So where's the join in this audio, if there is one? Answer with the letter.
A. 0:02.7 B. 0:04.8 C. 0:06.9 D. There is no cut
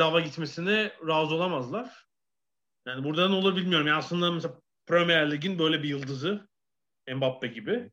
D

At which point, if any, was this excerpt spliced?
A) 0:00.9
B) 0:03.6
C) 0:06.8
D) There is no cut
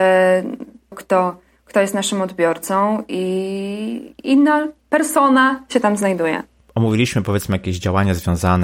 A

